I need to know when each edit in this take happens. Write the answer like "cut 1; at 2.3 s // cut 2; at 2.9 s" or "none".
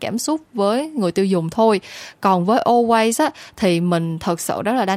none

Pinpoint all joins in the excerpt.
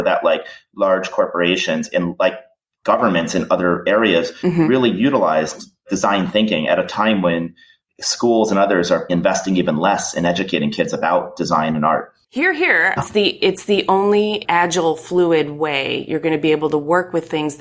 cut 1; at 9.1 s // cut 2; at 13.0 s // cut 3; at 14.4 s

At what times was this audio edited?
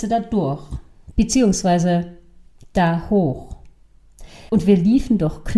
cut 1; at 4.5 s

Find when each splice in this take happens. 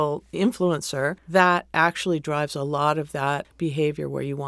cut 1; at 1.2 s // cut 2; at 3.4 s

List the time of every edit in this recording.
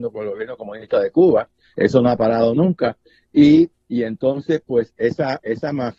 none

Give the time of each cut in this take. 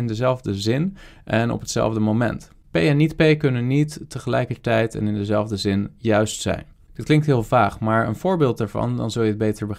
none

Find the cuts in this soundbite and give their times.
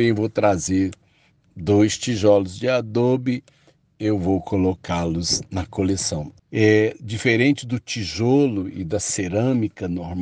cut 1; at 6.4 s

